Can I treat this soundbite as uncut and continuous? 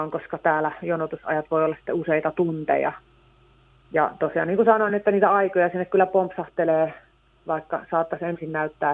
yes; 0 cuts

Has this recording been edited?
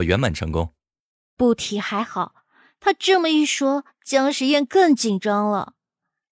no; 0 cuts

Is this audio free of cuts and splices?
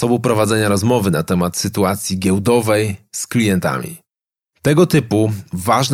yes; 0 cuts

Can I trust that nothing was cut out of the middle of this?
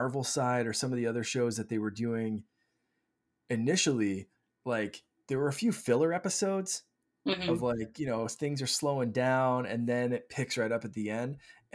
yes; 0 cuts

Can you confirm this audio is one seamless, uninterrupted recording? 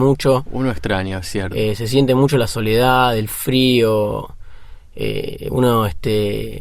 yes; 0 cuts

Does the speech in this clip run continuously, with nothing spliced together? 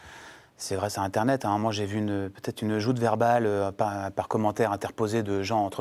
yes; 0 cuts

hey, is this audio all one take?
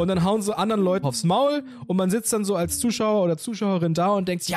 no; 1 cut; at 1.0 s

